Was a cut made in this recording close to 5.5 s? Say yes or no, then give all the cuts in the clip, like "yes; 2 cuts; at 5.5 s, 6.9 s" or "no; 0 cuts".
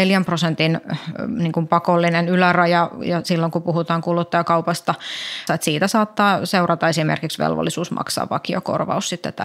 yes; 1 cut; at 5.5 s